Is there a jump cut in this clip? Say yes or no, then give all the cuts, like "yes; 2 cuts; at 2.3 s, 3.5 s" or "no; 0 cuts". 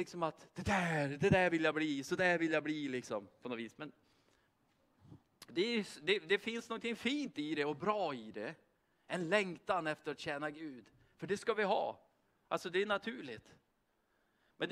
no; 0 cuts